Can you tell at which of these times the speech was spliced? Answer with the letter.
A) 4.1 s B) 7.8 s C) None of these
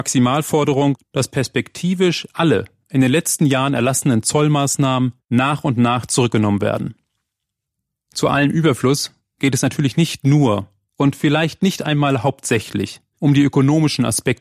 C